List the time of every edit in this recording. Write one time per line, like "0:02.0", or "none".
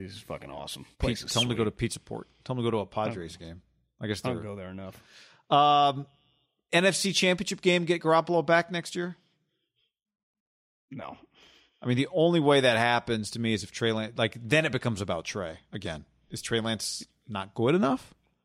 0:00.9